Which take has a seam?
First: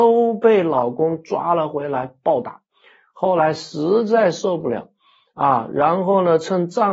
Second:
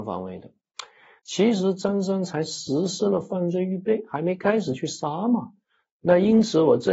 second; 2 cuts; at 1.2 s, 5.9 s

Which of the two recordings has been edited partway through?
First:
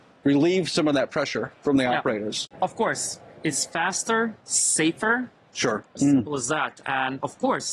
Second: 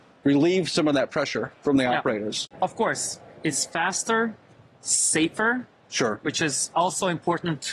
first; 2 cuts; at 4.4 s, 5.8 s

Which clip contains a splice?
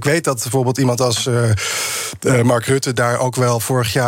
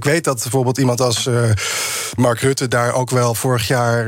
second; 1 cut; at 2.2 s

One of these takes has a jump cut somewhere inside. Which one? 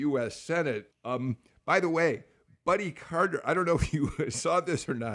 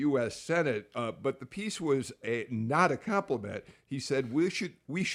first; 1 cut; at 0.9 s

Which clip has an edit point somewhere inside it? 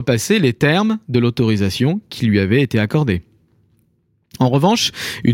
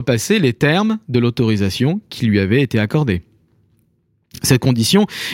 first; 1 cut; at 4.4 s

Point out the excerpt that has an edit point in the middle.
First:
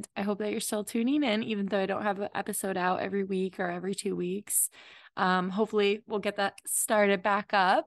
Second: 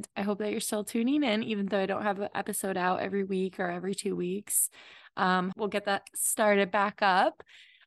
second; 1 cut; at 5.5 s

